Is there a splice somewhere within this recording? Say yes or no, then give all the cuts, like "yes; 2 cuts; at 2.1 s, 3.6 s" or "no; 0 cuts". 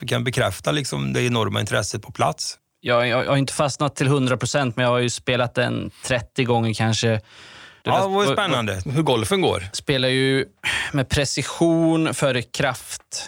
yes; 3 cuts; at 2.6 s, 7.8 s, 8.9 s